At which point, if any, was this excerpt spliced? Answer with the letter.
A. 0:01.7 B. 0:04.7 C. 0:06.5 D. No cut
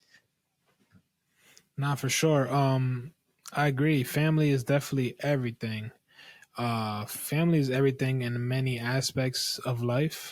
D